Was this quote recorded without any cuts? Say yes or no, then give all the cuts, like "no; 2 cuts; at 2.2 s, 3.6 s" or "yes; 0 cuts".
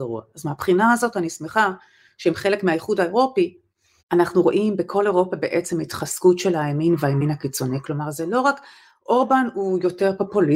no; 1 cut; at 4.0 s